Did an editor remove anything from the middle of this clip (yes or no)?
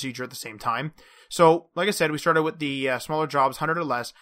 no